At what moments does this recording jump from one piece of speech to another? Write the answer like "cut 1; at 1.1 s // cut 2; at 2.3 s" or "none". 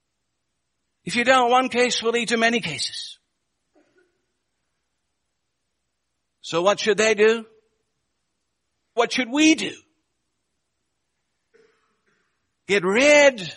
cut 1; at 9.0 s